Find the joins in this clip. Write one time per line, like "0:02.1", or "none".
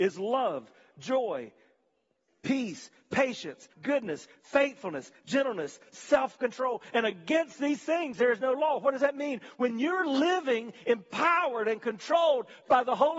0:03.7

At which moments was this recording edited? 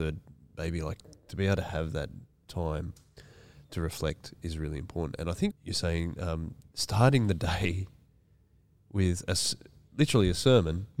0:05.5

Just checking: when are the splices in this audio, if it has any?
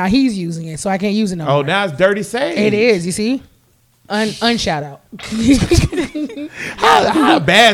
0:05.1

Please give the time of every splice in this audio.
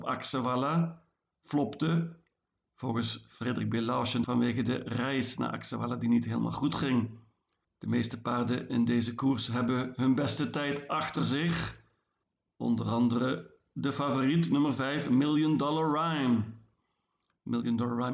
0:04.2
0:07.6

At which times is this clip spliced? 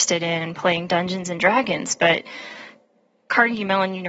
none

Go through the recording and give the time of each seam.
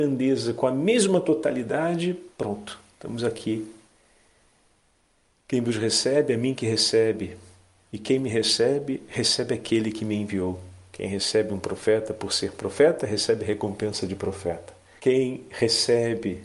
0:15.0

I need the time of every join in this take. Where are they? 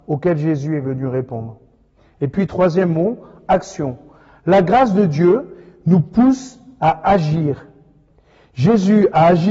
none

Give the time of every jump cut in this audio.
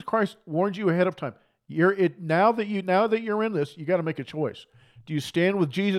none

